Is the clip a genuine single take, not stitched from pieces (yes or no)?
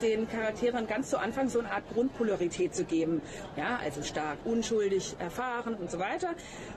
no